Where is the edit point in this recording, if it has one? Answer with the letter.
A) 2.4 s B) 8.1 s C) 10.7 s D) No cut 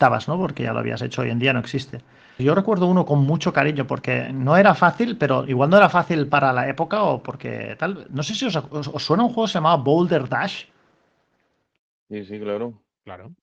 A